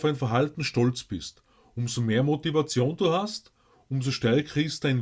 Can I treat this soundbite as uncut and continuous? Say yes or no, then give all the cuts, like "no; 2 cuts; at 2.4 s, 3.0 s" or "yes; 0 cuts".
yes; 0 cuts